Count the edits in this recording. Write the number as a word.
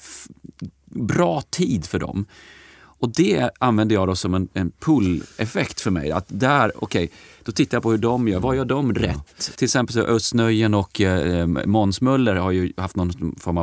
one